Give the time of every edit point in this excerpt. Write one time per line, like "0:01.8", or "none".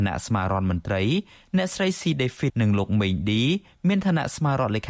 0:02.5